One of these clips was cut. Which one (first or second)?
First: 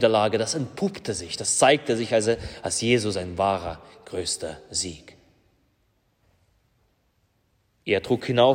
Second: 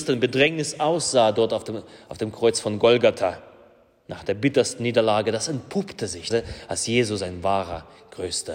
second